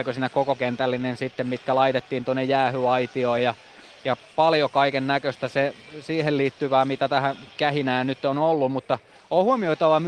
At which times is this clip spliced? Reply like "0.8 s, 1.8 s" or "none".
none

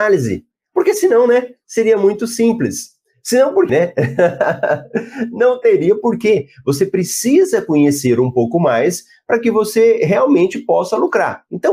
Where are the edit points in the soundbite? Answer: 3.7 s

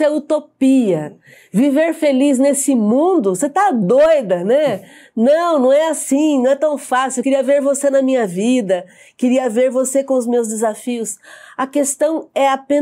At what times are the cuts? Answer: none

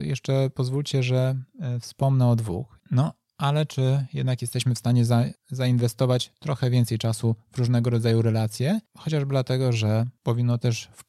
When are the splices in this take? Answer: 2.8 s

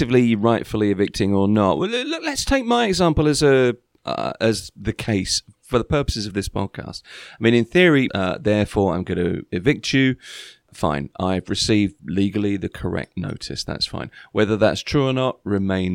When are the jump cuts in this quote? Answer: 8.1 s

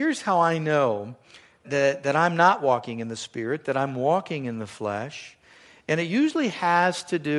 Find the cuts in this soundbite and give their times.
1.6 s

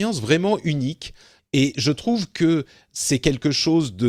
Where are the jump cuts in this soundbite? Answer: 1.4 s

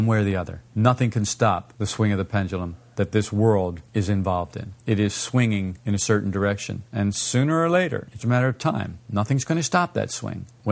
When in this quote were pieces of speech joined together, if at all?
8.2 s

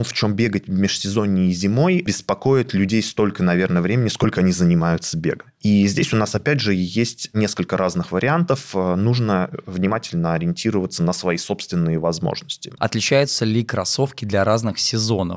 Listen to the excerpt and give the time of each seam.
12.8 s

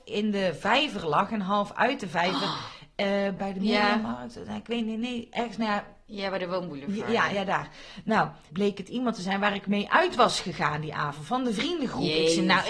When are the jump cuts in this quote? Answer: 3.4 s, 8.5 s

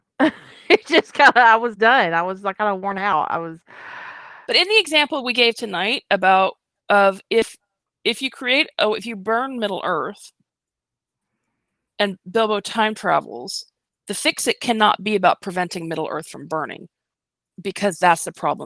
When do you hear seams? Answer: 4.5 s

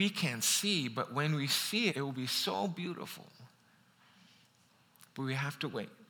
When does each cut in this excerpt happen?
1.9 s

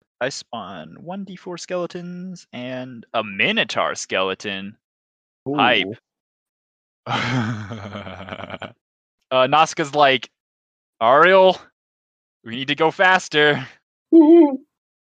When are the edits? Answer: 6.5 s

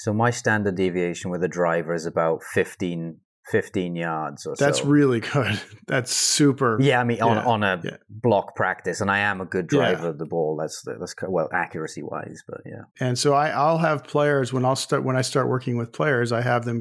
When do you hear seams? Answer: 12.9 s

